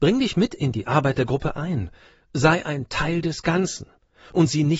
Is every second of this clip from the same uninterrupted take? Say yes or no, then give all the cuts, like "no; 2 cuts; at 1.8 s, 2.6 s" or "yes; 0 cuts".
yes; 0 cuts